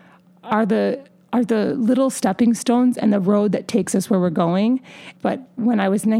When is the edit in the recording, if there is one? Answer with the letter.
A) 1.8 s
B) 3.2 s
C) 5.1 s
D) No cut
C